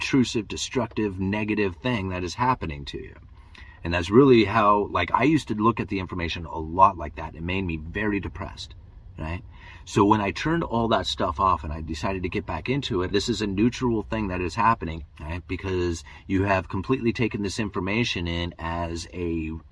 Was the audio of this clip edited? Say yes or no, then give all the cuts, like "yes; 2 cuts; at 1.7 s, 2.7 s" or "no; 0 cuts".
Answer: yes; 2 cuts; at 13.1 s, 15.0 s